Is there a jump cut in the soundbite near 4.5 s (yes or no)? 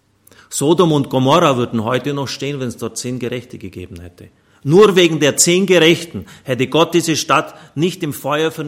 no